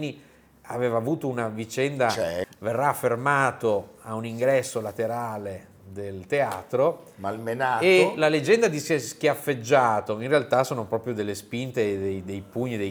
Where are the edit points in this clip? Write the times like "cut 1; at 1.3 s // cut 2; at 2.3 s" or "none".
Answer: cut 1; at 2.4 s

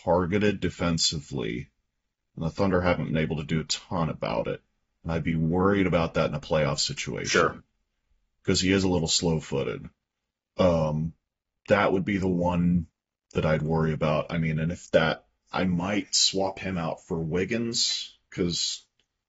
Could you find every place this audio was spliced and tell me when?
none

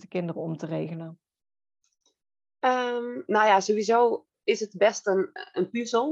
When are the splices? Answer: none

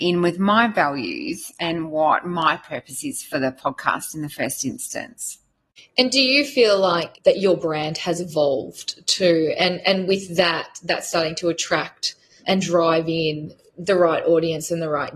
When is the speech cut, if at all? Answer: none

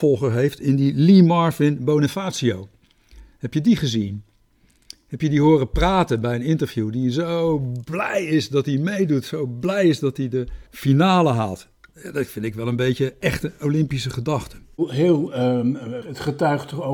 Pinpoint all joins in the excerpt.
cut 1; at 10.7 s // cut 2; at 16.0 s

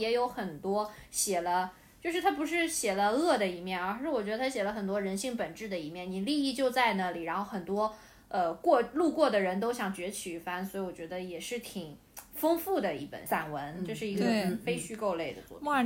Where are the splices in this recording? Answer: none

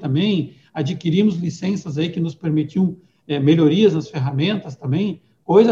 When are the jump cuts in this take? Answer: none

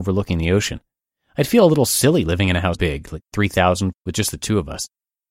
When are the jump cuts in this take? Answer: cut 1; at 2.7 s // cut 2; at 3.9 s

